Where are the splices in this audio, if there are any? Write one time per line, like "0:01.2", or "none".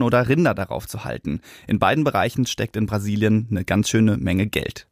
none